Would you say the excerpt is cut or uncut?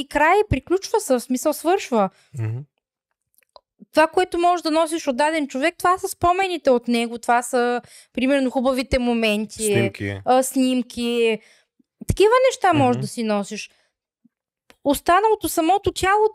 uncut